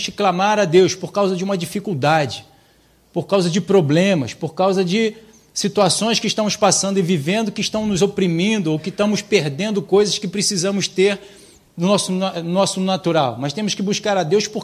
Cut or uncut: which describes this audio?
uncut